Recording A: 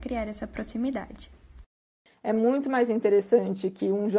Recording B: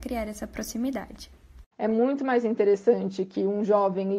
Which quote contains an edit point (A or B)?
B